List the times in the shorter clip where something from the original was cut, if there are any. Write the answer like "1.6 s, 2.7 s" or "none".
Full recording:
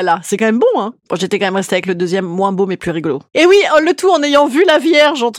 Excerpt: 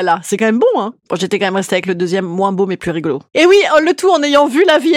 none